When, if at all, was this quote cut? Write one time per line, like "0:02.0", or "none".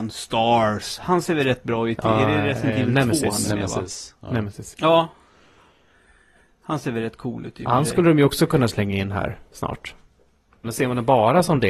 0:04.7
0:10.6